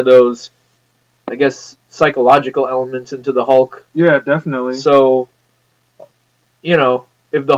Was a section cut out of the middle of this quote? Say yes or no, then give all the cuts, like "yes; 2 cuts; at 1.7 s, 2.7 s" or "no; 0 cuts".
no; 0 cuts